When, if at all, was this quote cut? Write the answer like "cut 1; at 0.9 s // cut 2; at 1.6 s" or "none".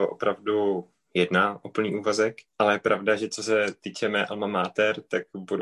cut 1; at 2.5 s